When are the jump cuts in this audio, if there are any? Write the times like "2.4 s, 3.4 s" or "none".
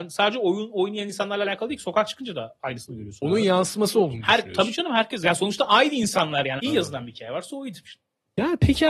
6.6 s, 7.8 s